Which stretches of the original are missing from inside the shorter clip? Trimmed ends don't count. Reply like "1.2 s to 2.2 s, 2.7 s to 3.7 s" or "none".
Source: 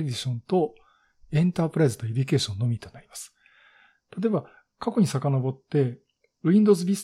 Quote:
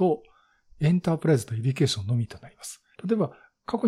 3.4 s to 4.1 s